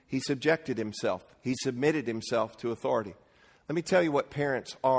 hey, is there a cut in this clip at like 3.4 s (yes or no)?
no